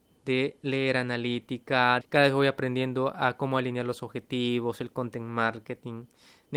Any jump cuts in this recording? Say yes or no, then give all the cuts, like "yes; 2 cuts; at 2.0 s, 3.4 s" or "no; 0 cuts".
yes; 1 cut; at 2.0 s